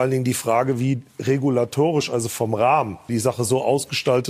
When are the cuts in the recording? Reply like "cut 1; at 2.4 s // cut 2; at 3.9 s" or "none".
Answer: cut 1; at 3.1 s